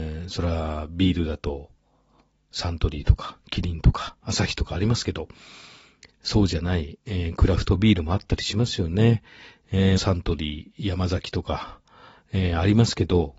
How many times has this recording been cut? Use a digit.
1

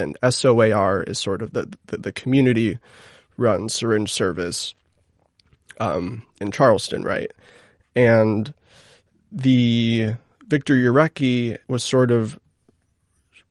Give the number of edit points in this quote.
3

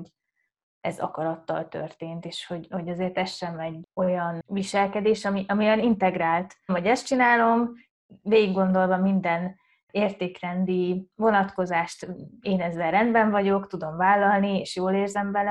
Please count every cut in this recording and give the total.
1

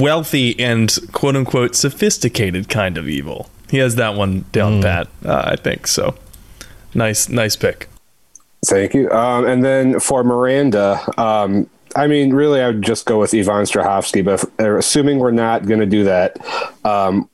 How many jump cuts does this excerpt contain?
0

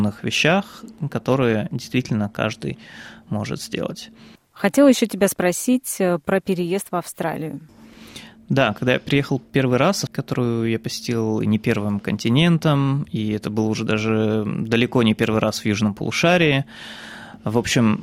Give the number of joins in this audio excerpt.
2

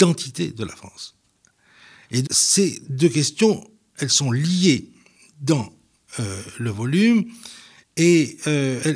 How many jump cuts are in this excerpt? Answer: 1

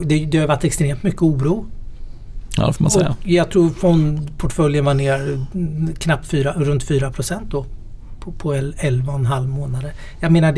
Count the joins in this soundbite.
0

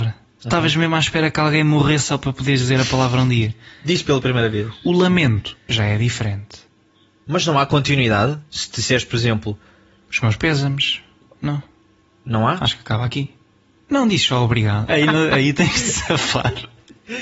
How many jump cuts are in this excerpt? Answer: 2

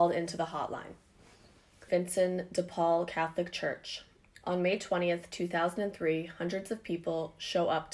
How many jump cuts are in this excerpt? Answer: 1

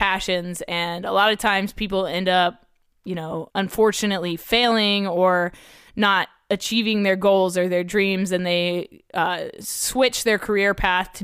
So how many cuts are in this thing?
1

